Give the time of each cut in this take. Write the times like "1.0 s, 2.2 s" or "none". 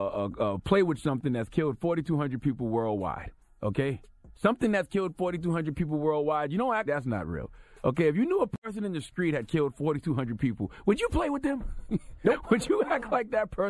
6.9 s